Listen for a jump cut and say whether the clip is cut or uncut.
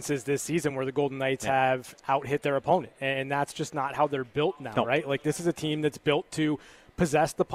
uncut